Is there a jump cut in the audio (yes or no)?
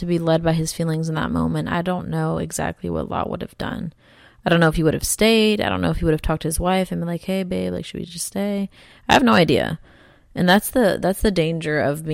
no